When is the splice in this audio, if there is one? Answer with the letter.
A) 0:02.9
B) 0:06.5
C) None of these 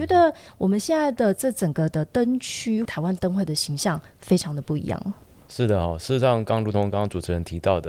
A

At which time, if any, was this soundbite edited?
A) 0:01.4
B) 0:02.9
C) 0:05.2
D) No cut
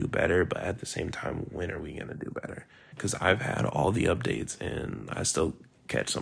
B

